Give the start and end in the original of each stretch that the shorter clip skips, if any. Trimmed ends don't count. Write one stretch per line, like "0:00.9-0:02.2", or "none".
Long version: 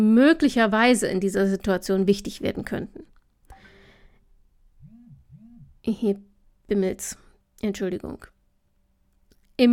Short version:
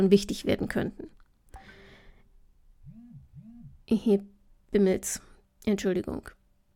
none